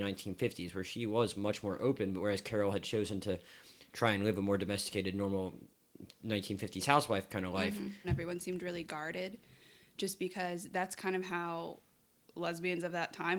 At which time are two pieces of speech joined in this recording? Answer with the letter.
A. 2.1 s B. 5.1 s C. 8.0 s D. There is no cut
C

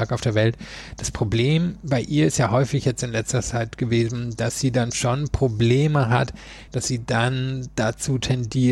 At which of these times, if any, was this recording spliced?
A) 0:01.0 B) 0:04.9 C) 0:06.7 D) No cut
C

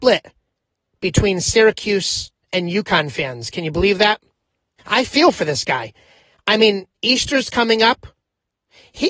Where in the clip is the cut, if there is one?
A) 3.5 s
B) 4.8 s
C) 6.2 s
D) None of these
B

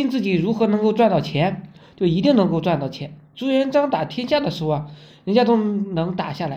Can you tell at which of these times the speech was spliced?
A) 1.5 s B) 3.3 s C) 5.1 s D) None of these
D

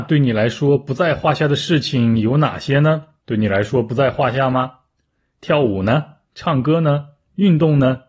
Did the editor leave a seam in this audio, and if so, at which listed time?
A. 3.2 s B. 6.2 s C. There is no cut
A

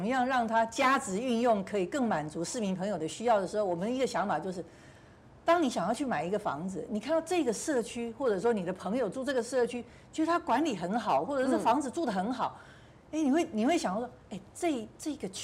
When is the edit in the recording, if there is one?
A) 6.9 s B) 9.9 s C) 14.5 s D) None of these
D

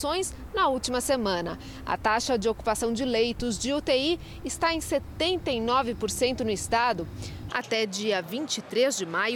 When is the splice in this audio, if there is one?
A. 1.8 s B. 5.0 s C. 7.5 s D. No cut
C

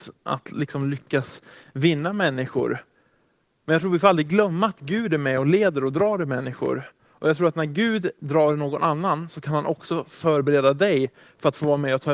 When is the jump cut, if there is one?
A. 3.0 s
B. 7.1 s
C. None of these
C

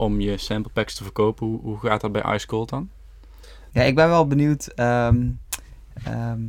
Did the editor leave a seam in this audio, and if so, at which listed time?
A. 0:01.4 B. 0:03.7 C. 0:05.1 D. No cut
B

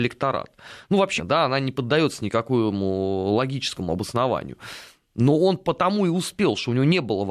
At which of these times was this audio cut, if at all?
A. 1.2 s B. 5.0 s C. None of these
A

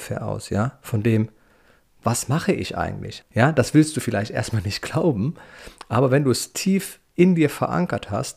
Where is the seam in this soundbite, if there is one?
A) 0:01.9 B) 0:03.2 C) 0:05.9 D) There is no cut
B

